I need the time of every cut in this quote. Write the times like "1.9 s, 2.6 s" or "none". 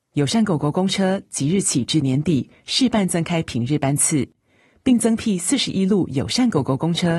none